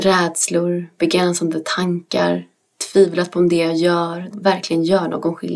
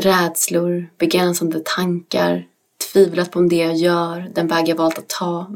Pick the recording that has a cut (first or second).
first